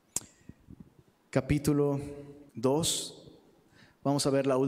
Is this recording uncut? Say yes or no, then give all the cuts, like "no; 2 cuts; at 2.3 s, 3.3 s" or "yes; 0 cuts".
no; 1 cut; at 2.5 s